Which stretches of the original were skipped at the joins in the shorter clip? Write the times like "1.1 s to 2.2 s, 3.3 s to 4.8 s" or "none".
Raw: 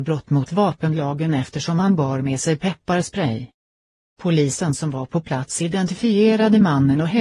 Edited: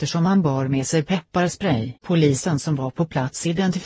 3.5 s to 4.1 s